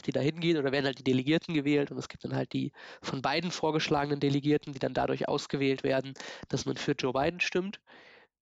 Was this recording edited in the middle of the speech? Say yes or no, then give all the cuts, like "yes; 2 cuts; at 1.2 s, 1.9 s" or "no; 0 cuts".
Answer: no; 0 cuts